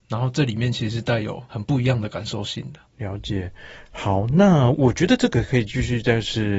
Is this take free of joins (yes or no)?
no